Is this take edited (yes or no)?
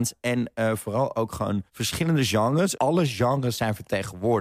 yes